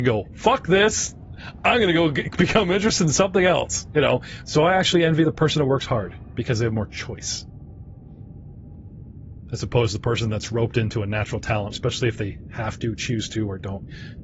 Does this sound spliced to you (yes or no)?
yes